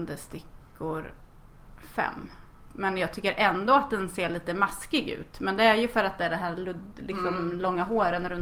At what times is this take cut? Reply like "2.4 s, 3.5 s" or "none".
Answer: 2.7 s